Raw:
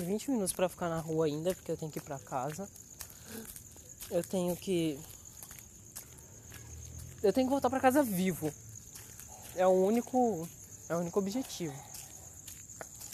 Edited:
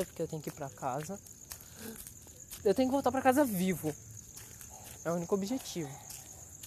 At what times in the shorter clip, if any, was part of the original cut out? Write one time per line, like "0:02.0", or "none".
0:02.6
0:05.0